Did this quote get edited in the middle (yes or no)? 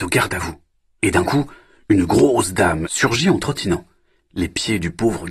yes